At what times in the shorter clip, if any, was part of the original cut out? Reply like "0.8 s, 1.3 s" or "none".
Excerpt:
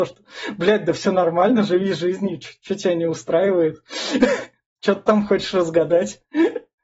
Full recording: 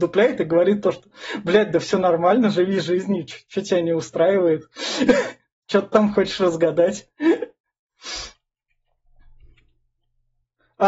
none